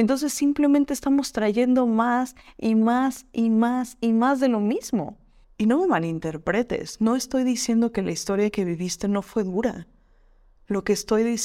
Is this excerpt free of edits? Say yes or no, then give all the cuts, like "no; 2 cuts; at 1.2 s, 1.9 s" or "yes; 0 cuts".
no; 1 cut; at 5.4 s